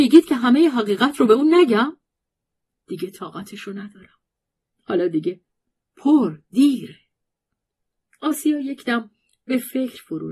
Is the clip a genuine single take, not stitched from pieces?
no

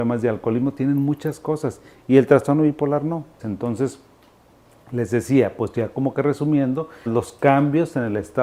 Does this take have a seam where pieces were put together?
yes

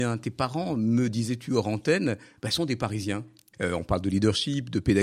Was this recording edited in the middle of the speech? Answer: yes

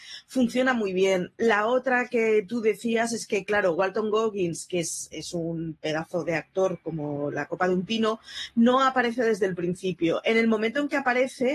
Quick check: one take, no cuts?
yes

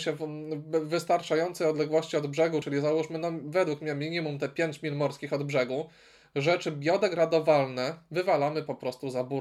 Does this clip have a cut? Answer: no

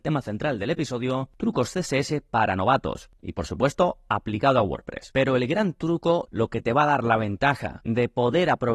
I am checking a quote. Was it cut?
yes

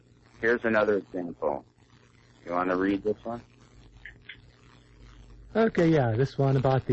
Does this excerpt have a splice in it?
no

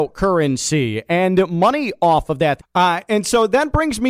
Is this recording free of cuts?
no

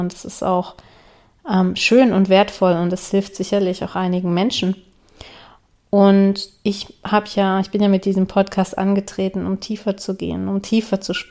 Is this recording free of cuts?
yes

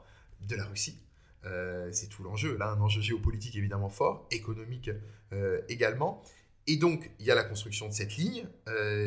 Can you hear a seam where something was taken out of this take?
no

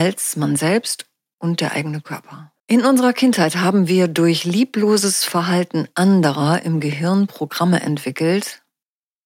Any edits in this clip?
yes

